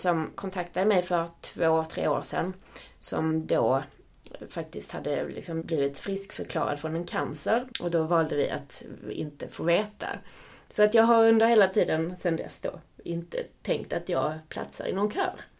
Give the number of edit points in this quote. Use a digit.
2